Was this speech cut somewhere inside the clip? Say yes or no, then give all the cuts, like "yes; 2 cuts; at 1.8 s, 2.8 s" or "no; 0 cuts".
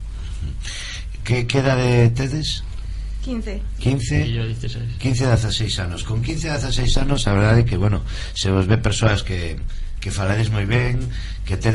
no; 0 cuts